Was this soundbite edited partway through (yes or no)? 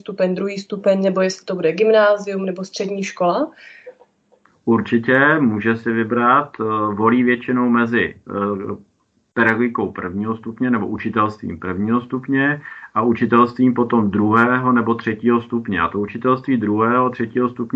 no